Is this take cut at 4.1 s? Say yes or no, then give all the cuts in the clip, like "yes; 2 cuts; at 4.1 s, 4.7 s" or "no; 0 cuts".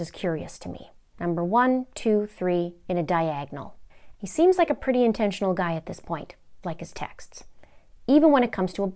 yes; 2 cuts; at 4.1 s, 6.6 s